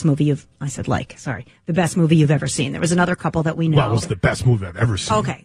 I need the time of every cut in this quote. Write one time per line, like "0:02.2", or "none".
none